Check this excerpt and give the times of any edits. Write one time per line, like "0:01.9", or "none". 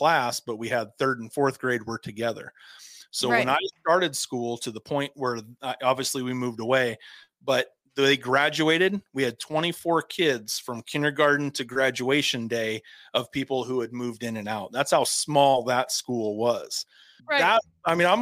0:17.2